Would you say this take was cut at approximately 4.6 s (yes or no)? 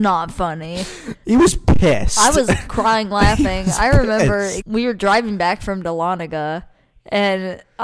yes